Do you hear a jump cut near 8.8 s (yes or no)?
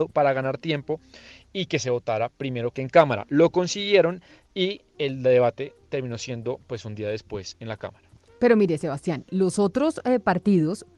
no